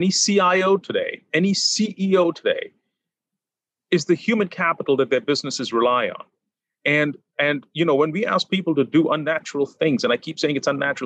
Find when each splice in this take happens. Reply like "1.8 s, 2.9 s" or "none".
none